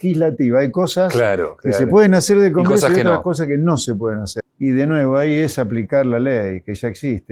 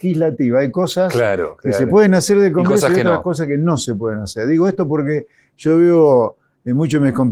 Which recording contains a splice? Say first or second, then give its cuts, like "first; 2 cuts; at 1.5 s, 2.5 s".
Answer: first; 1 cut; at 4.4 s